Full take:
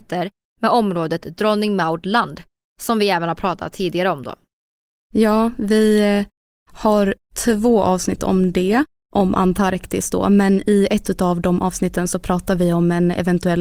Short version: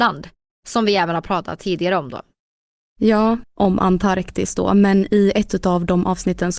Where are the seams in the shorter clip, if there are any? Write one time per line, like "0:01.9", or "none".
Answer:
0:03.4